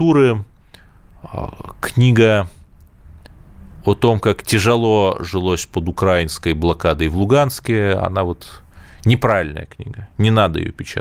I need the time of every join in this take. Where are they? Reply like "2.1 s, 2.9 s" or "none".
none